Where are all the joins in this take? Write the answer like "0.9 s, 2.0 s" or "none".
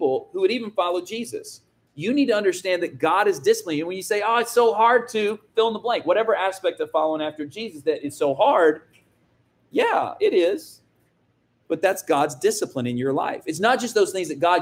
none